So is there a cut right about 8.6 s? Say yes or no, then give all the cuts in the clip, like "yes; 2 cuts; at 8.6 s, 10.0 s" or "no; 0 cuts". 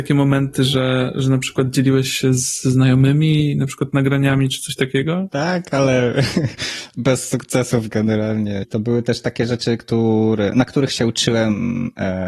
yes; 1 cut; at 8.6 s